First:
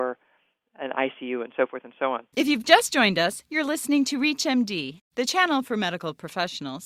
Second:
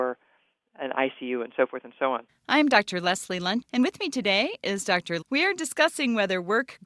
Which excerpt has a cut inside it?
second; 3 cuts; at 2.3 s, 3.6 s, 5.2 s

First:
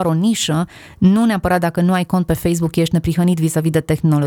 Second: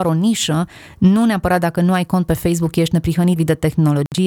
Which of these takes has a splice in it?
second; 1 cut; at 3.4 s

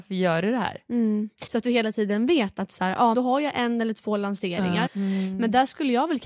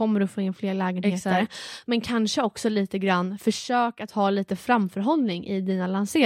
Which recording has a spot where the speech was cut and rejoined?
first; 3 cuts; at 1.5 s, 3.1 s, 4.9 s

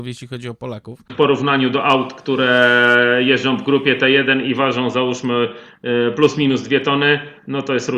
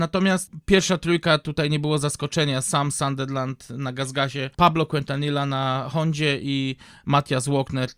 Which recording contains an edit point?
first; 1 cut; at 1.1 s

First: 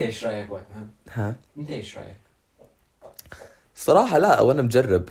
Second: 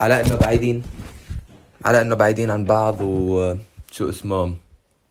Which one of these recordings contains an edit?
first; 1 cut; at 3.6 s

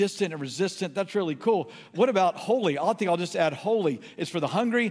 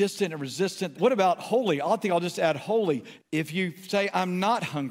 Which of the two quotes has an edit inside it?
second; 2 cuts; at 0.9 s, 3.2 s

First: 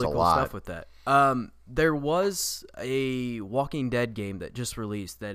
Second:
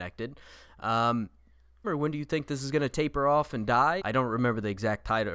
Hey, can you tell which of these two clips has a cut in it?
second; 2 cuts; at 1.8 s, 4.0 s

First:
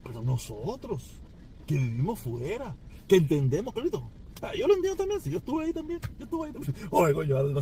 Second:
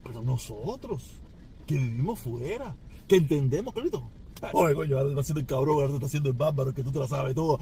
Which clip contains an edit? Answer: second; 1 cut; at 4.5 s

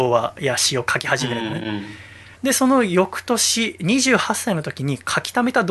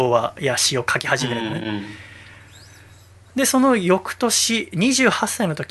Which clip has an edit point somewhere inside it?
first; 1 cut; at 2.4 s

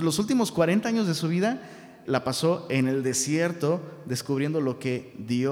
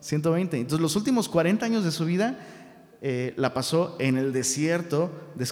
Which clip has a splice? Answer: first; 1 cut; at 2.1 s

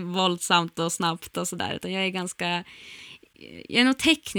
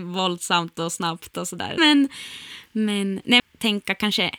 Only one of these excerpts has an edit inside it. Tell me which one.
second; 2 cuts; at 1.8 s, 3.4 s

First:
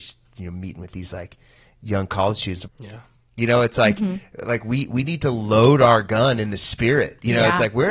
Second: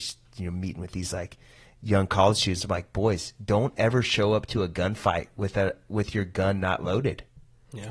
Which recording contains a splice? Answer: first; 1 cut; at 2.7 s

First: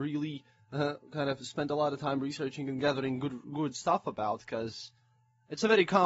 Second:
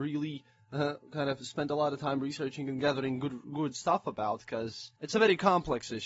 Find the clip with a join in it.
second; 1 cut; at 5.0 s

